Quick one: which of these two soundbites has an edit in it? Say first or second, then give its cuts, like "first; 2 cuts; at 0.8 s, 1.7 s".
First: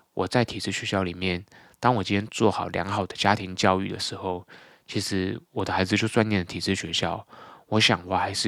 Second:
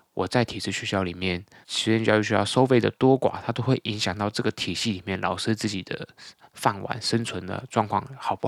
second; 1 cut; at 1.6 s